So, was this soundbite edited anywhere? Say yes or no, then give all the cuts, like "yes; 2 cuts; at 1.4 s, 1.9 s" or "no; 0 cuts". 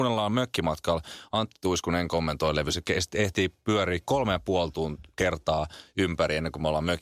no; 0 cuts